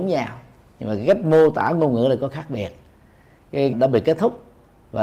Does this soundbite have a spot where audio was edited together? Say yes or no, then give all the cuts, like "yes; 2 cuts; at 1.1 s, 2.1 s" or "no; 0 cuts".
yes; 1 cut; at 3.7 s